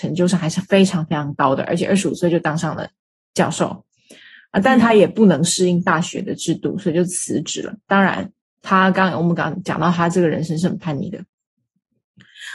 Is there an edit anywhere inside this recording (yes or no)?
no